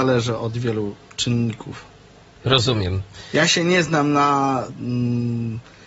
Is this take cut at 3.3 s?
no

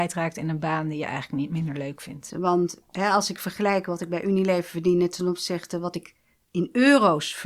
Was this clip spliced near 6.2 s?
no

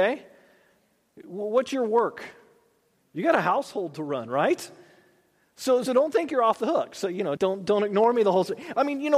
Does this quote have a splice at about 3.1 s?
no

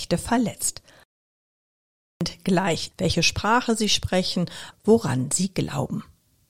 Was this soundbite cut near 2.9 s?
yes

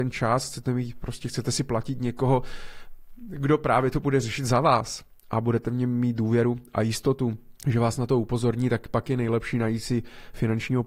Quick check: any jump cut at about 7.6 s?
yes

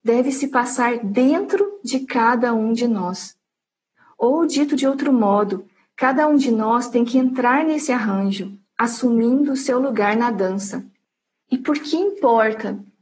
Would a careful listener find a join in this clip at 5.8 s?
no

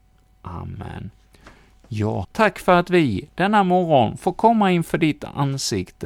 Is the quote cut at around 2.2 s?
yes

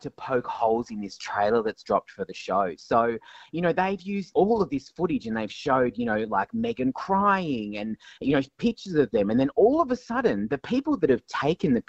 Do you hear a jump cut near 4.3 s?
yes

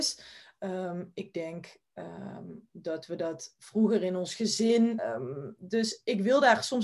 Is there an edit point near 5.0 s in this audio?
yes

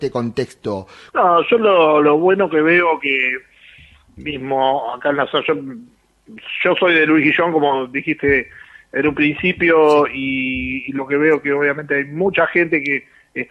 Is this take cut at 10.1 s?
no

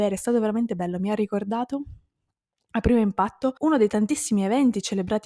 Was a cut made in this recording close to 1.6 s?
no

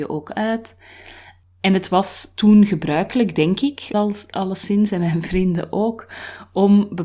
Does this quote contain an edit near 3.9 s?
yes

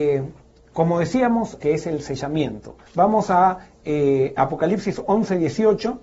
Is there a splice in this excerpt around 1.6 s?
yes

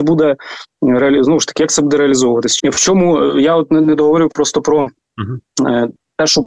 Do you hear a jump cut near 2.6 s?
yes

